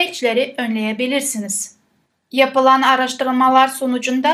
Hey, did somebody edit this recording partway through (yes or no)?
yes